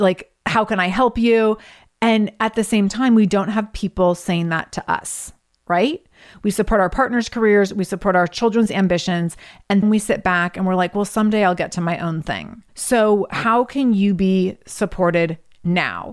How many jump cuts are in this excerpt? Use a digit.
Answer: 1